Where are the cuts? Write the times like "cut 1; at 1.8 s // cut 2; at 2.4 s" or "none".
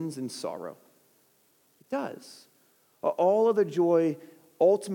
none